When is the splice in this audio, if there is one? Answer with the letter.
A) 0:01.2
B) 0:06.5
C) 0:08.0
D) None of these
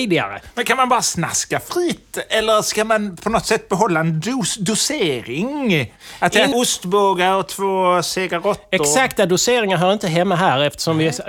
B